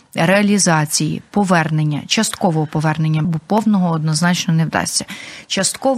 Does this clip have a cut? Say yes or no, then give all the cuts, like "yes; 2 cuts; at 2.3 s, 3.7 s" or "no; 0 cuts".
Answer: yes; 1 cut; at 3.2 s